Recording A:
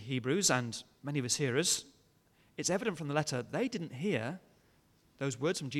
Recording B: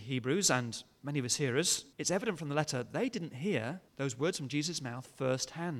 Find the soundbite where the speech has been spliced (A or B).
B